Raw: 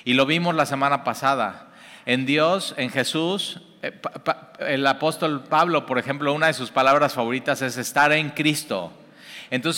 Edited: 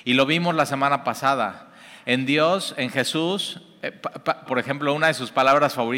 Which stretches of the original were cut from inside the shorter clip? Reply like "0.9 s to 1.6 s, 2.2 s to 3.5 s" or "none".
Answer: 4.5 s to 5.9 s